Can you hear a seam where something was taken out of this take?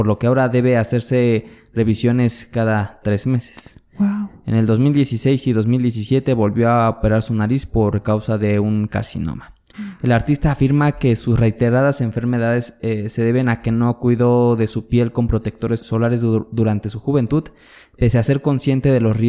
yes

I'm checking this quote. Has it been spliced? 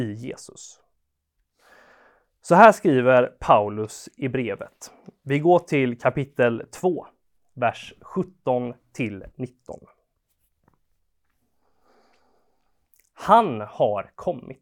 no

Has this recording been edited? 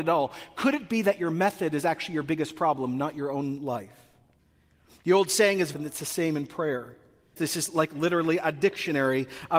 yes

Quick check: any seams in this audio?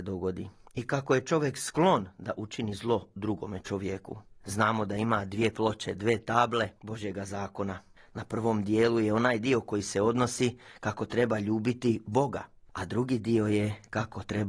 yes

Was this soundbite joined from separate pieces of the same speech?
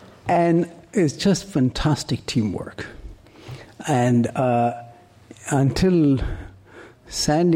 no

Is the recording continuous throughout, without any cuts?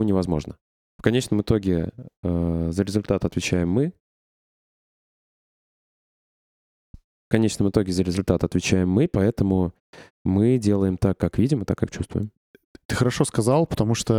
yes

